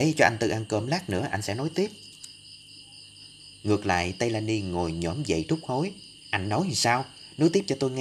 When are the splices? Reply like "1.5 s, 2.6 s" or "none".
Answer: 3.6 s